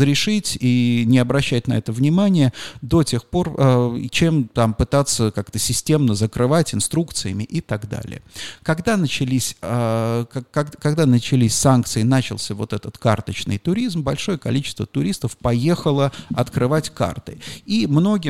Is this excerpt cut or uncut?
uncut